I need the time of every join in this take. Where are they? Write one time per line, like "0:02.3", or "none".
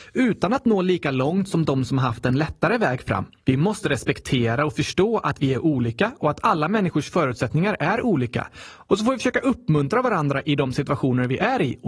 0:03.4